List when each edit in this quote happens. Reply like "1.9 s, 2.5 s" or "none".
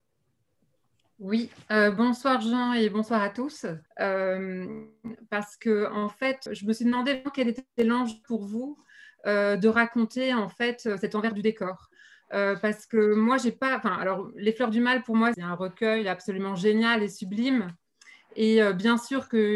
3.9 s, 6.5 s, 15.3 s

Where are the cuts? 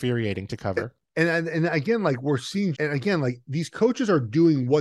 2.7 s

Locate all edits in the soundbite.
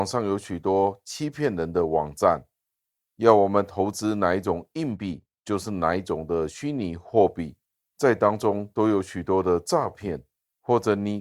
none

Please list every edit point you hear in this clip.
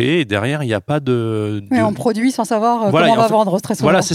none

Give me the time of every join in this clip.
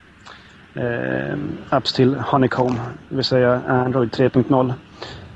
none

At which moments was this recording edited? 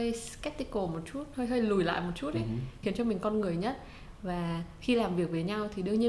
2.8 s

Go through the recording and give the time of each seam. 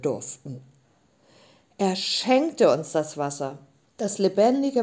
3.8 s

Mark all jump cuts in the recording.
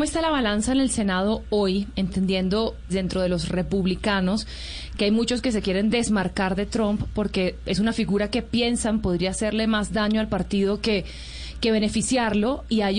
2.9 s

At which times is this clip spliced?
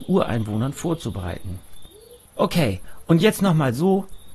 2.3 s

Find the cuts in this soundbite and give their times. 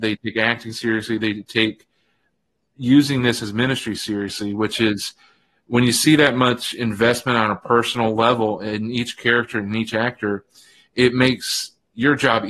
none

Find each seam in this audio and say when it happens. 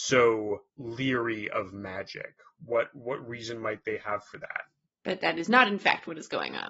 4.8 s

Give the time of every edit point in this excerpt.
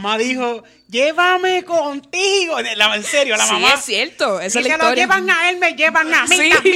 none

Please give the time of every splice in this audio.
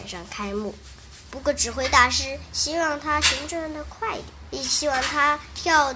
1.3 s, 4.5 s

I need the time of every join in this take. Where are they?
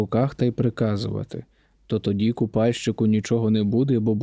1.7 s

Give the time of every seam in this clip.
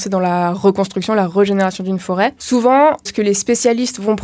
none

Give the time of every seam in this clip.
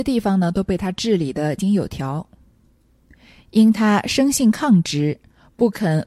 1.6 s

